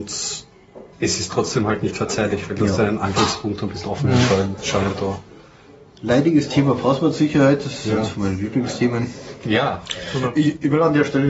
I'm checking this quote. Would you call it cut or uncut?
cut